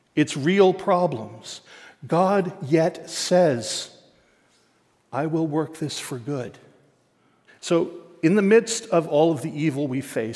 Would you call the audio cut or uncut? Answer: cut